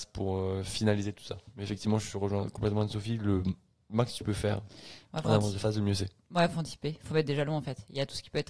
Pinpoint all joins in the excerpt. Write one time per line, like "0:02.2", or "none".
none